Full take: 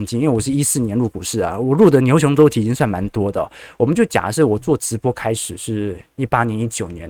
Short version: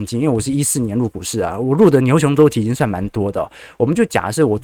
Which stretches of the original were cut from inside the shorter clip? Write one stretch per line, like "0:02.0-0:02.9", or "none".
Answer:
none